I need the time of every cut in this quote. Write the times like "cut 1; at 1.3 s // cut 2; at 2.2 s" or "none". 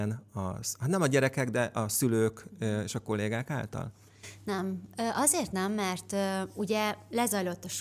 none